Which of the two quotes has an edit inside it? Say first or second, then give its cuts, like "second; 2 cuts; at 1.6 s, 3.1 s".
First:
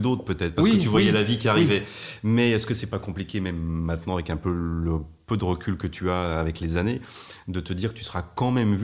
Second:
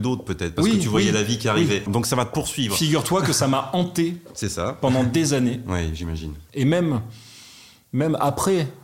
second; 2 cuts; at 1.9 s, 6.5 s